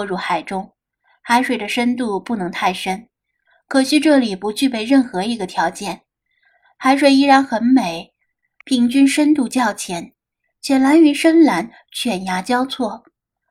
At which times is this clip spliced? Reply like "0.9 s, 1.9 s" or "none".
8.6 s